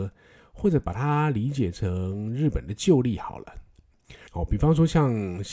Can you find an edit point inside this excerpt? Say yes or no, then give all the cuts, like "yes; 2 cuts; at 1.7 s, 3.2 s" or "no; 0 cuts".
yes; 1 cut; at 4.3 s